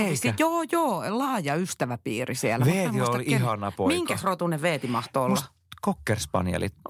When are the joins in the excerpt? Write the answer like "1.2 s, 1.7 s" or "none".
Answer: none